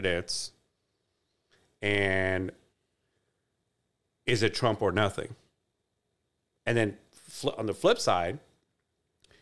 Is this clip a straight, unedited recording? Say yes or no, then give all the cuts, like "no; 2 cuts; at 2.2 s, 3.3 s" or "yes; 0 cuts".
yes; 0 cuts